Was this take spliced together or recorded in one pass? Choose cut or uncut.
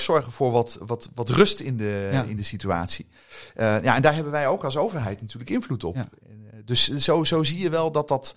uncut